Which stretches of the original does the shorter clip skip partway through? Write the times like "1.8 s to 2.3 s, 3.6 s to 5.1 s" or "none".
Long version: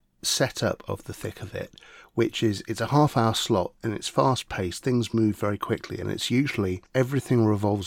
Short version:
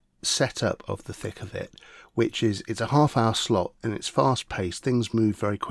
none